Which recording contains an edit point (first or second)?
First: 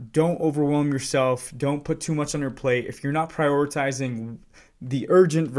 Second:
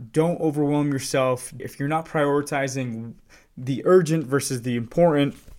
second